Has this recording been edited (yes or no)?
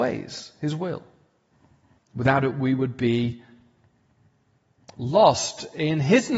yes